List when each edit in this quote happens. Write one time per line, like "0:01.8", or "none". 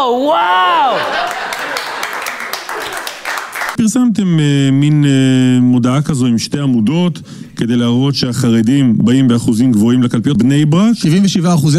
0:03.8
0:10.4

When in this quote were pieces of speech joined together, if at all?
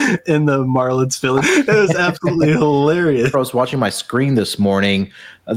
0:01.4
0:03.3

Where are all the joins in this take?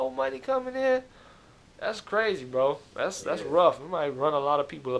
0:03.2

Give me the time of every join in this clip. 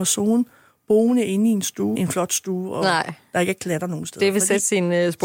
0:02.0

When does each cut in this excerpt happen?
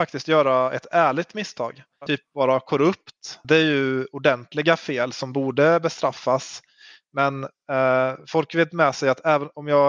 0:02.1
0:03.4

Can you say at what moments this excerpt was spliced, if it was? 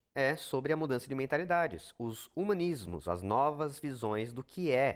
0:03.0

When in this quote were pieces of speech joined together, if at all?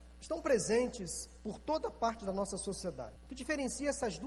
0:03.2

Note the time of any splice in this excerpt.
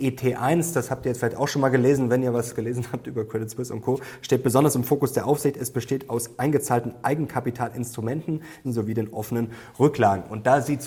0:08.6

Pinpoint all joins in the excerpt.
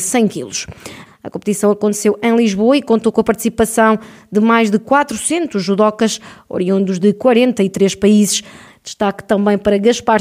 0:01.1
0:08.7

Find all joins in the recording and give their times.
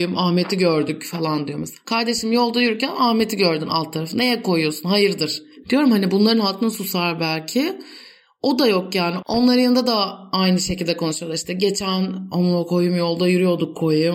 0:05.6

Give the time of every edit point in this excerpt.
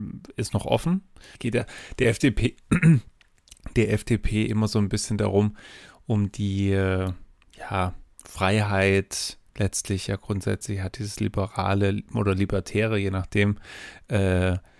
0:08.1

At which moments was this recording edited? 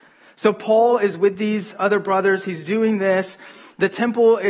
none

